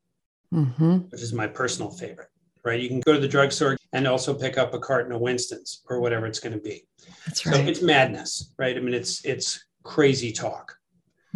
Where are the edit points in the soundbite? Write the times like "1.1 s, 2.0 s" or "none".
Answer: 3.8 s